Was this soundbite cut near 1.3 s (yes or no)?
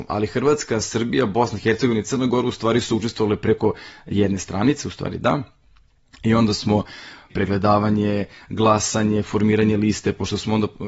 no